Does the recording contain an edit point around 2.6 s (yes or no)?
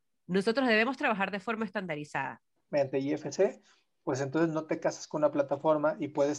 yes